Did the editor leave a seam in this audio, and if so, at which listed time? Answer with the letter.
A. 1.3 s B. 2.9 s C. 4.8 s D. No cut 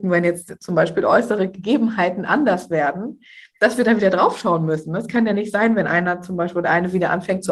D